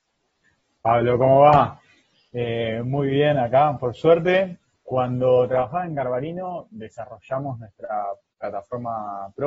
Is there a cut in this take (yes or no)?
yes